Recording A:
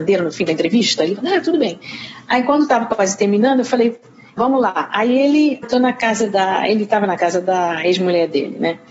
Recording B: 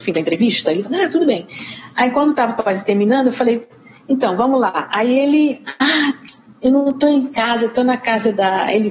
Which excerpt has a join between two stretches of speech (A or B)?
A